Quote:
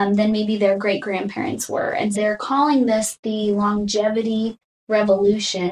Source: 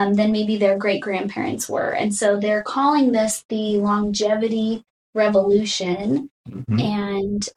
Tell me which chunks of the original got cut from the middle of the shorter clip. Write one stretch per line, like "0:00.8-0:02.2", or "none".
0:02.1-0:02.4